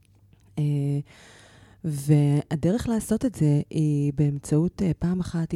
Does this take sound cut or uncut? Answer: uncut